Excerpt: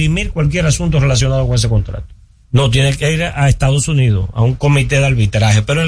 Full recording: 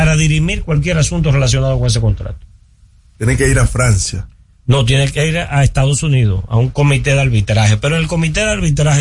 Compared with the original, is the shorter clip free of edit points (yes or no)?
no